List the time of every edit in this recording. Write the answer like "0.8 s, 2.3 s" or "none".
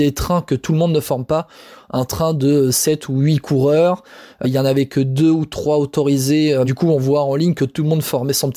4.4 s, 6.6 s